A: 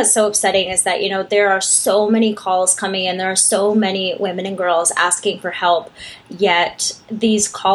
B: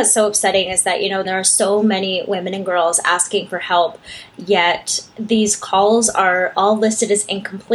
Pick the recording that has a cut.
B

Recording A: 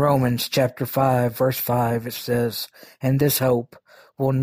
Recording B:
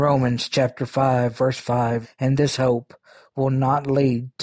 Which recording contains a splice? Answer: B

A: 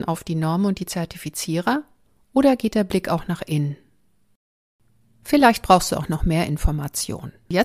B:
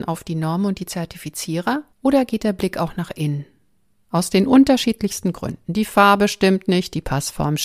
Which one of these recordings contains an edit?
B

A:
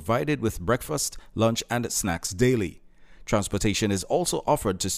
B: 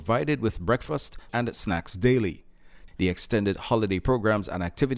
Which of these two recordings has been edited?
B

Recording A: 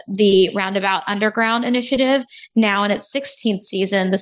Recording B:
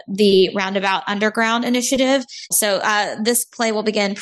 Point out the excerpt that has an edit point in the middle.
B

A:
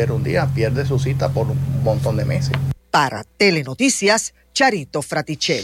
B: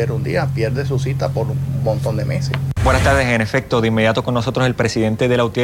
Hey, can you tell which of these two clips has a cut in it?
B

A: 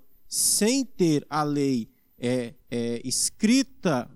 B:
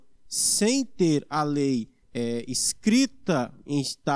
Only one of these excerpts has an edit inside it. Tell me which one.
B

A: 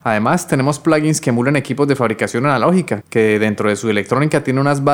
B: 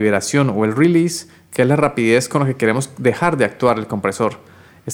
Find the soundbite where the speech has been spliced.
A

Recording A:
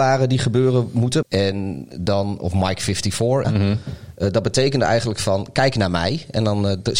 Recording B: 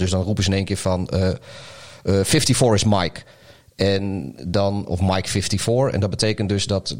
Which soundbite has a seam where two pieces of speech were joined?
A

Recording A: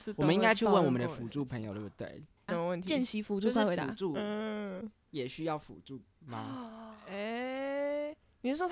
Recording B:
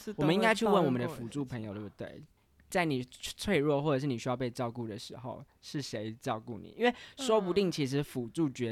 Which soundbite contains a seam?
A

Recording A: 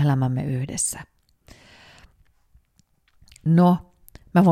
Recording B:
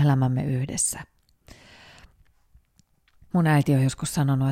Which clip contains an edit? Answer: B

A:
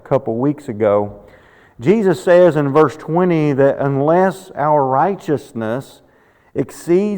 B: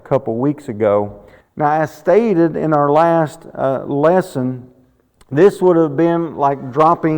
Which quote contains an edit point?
B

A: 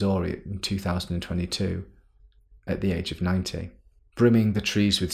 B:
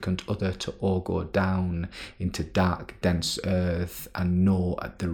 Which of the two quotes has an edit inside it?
A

